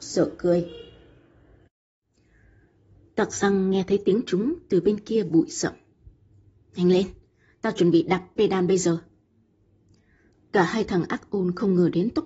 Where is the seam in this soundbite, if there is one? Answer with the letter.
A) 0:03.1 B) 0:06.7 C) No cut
C